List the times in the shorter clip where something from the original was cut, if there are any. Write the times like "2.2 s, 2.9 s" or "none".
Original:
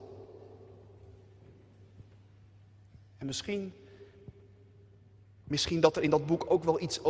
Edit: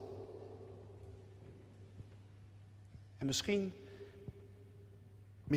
none